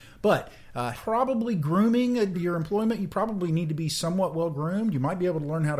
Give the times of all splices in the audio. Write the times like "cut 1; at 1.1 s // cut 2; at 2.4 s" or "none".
cut 1; at 0.9 s // cut 2; at 2.3 s